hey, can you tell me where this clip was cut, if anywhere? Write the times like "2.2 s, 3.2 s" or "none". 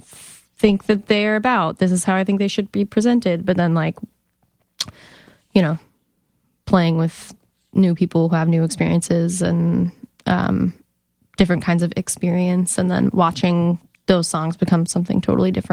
none